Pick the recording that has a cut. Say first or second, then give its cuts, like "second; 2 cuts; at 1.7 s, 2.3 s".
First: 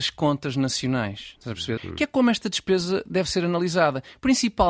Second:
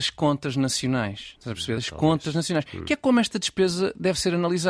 first; 1 cut; at 1.8 s